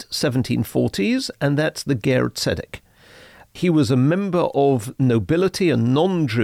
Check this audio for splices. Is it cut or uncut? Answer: uncut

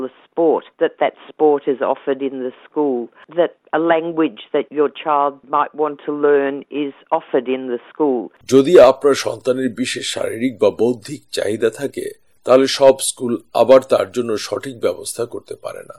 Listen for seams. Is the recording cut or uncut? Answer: cut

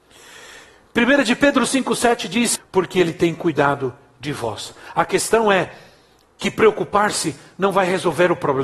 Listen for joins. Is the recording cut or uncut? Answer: cut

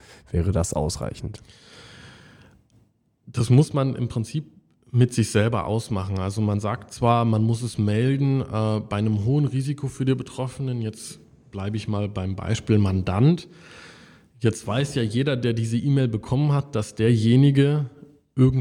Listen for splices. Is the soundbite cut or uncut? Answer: uncut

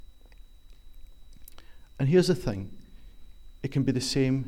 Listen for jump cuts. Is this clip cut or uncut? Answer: uncut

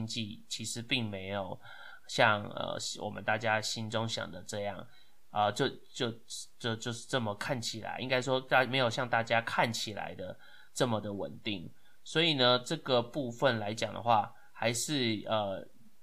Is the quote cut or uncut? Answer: uncut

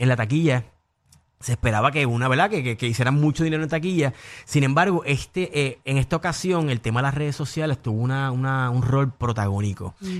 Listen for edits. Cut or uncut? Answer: uncut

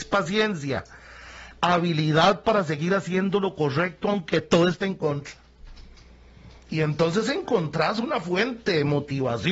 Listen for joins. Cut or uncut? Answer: uncut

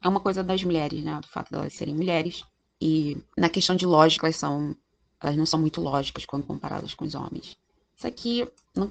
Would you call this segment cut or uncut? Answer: uncut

